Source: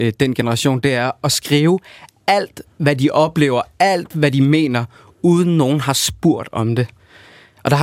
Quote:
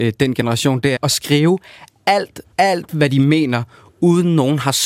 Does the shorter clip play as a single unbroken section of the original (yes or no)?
no